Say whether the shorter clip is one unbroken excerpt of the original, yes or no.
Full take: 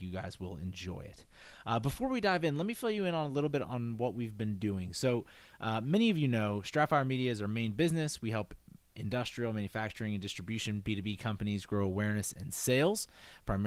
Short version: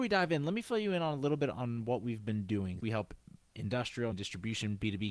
no